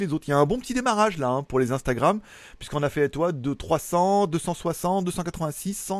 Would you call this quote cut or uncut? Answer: uncut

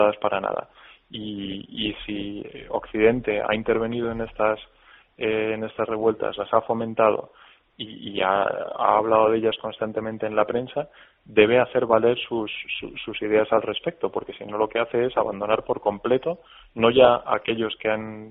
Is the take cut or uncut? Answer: uncut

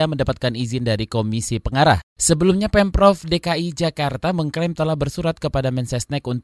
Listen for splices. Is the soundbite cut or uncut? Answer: uncut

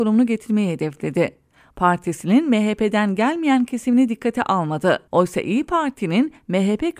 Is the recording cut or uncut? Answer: cut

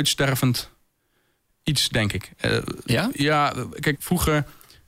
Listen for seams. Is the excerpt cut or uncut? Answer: cut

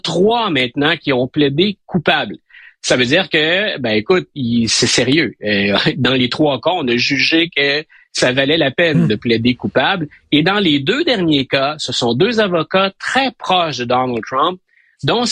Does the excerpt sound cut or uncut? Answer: uncut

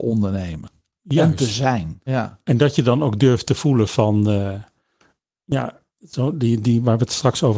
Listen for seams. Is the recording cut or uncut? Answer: cut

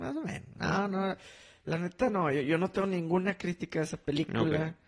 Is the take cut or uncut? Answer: uncut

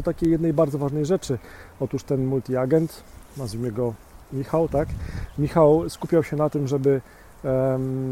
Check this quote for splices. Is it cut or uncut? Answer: uncut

